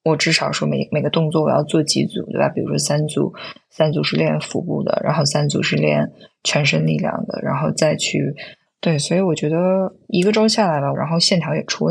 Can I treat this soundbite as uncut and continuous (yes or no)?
no